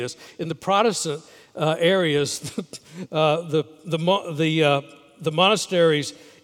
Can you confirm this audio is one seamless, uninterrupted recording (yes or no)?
yes